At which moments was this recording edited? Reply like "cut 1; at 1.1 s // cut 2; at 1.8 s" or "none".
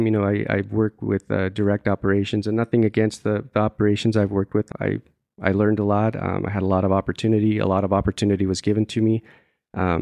cut 1; at 4.7 s